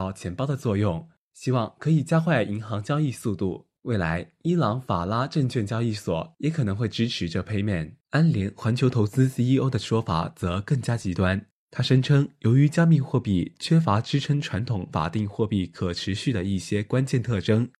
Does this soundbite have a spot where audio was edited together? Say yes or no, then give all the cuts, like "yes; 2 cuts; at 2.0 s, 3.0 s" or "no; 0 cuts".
yes; 1 cut; at 8.0 s